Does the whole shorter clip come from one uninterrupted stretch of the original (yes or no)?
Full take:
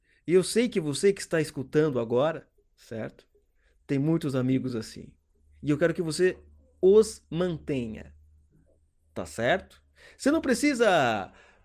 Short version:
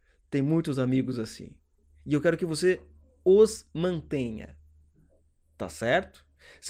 yes